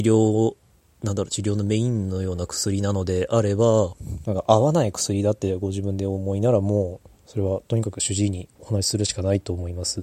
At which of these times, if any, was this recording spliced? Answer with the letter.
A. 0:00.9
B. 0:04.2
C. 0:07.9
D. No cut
B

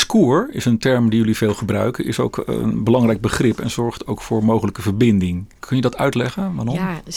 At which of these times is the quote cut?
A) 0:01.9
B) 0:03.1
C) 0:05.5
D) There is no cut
C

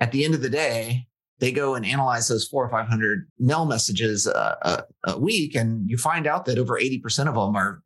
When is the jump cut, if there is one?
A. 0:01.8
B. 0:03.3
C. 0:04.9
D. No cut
B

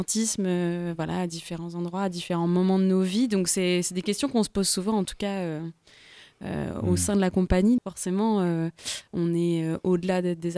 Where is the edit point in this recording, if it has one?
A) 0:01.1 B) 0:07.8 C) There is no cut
B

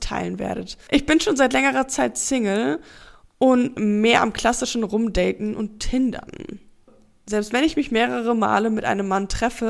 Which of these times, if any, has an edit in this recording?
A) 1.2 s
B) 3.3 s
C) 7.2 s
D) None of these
D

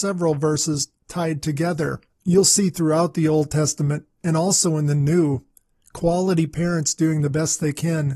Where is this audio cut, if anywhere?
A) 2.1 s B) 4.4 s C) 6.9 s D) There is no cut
A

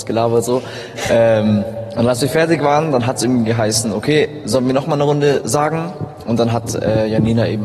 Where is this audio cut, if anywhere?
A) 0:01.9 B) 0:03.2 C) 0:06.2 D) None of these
D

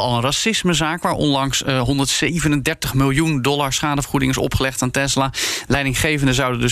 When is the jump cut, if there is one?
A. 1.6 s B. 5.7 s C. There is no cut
C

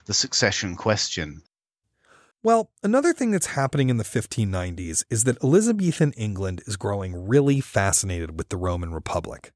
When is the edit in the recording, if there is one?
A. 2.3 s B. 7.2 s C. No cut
A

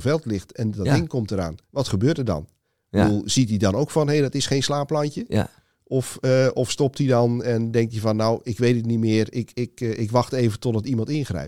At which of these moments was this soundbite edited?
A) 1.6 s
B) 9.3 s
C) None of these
A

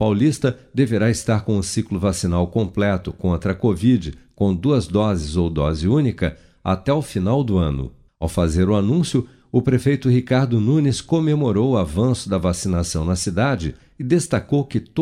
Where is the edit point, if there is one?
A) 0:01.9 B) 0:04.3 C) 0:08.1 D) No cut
C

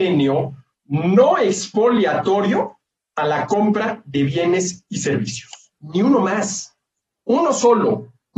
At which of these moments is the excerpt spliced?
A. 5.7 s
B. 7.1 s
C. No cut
A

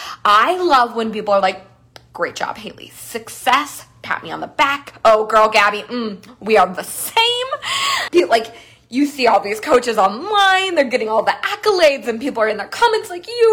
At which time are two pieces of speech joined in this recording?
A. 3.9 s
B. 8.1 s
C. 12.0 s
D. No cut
B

